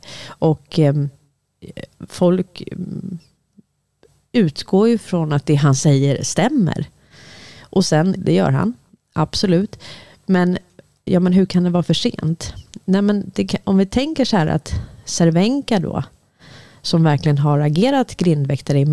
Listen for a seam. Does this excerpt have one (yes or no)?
yes